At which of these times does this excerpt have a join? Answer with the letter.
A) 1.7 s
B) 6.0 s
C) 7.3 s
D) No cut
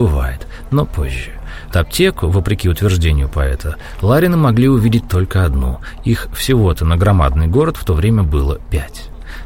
A